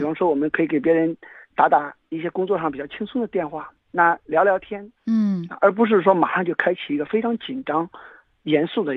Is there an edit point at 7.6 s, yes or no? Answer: no